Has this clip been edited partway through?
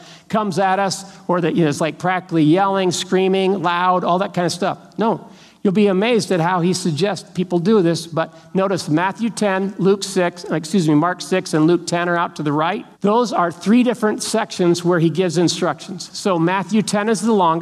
yes; 1 cut; at 12.9 s

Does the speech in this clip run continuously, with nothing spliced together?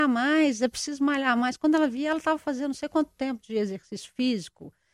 yes; 0 cuts

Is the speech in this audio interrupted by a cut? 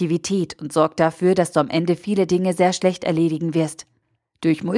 no; 0 cuts

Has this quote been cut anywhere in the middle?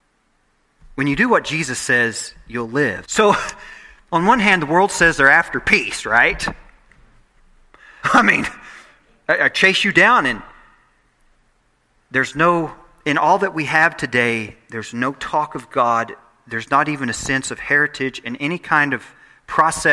yes; 2 cuts; at 3.0 s, 8.0 s

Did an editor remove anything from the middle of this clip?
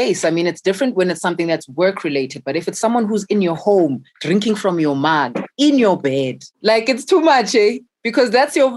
yes; 1 cut; at 6.5 s

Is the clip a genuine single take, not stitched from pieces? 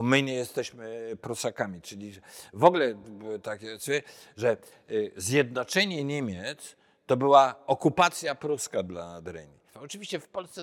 no; 1 cut; at 9.7 s

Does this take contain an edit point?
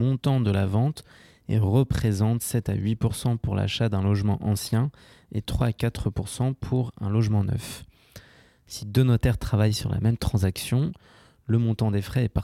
no; 0 cuts

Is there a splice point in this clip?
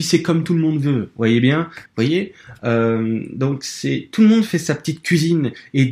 yes; 1 cut; at 1.9 s

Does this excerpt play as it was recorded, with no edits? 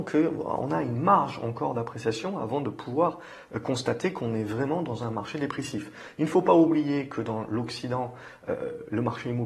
yes; 0 cuts

